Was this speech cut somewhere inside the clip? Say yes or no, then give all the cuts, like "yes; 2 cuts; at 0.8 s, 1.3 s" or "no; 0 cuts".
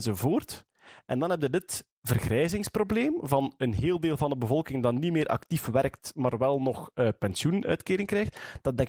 no; 0 cuts